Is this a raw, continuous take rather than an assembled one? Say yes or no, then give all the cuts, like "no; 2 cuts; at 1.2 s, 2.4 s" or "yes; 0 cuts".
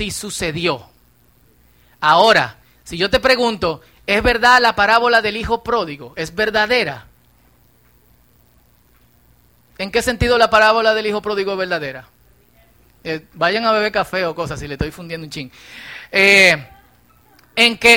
yes; 0 cuts